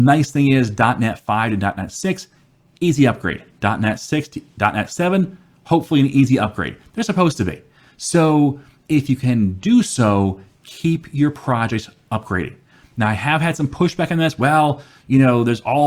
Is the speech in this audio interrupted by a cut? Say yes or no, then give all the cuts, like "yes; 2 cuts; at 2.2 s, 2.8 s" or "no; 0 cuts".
no; 0 cuts